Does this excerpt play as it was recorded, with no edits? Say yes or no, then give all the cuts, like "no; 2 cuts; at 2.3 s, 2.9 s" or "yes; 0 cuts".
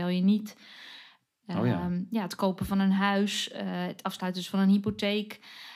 yes; 0 cuts